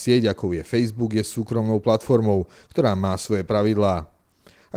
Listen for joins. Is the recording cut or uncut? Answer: uncut